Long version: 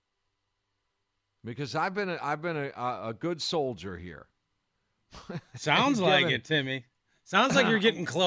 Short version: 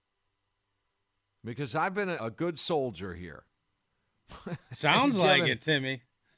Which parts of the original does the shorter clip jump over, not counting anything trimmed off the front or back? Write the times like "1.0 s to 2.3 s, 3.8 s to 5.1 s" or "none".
2.2 s to 3.0 s